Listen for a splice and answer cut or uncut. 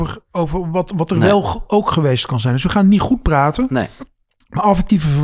uncut